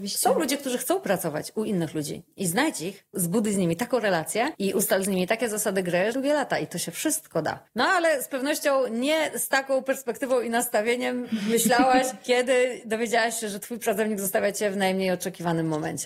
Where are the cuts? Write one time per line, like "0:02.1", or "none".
0:06.1